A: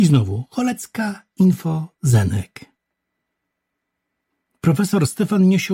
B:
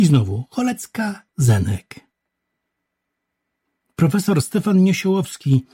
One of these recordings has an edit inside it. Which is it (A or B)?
B